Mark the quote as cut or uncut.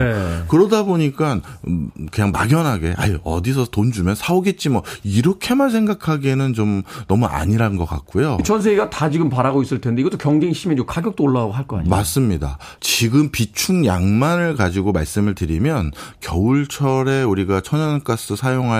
cut